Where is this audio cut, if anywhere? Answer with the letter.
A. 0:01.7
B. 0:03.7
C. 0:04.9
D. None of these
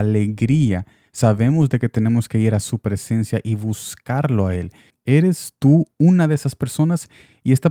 C